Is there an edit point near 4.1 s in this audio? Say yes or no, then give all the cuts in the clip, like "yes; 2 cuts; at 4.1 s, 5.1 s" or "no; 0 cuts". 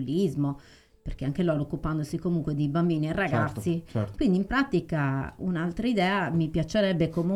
yes; 1 cut; at 4.1 s